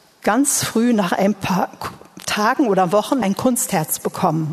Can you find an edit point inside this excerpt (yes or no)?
yes